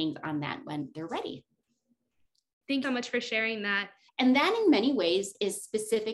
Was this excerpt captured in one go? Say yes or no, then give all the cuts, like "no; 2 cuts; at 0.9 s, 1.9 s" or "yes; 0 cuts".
no; 2 cuts; at 2.8 s, 4.1 s